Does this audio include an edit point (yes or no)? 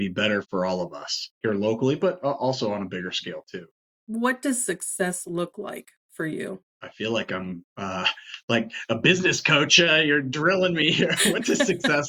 no